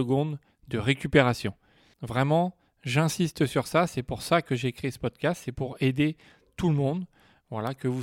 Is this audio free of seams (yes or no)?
no